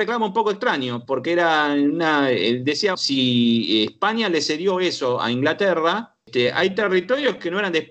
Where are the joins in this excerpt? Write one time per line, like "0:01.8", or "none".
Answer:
0:02.9